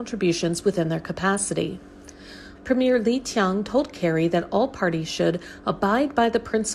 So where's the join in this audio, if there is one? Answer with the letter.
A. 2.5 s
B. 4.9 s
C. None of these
A